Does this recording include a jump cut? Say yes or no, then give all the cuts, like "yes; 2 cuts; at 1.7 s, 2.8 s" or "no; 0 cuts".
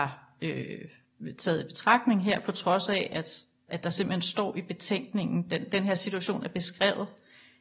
yes; 1 cut; at 3.7 s